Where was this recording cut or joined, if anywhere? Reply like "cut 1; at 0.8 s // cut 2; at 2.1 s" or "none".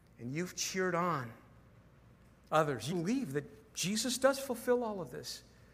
cut 1; at 2.9 s